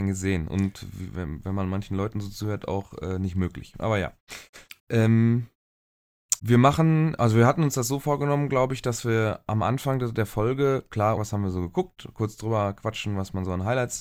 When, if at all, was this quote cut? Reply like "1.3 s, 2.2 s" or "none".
4.8 s, 6.4 s, 11.2 s